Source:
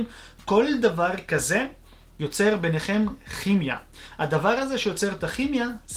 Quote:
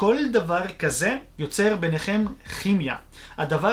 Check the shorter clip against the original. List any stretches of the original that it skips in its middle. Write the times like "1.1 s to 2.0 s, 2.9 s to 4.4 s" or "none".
1.8 s to 2.1 s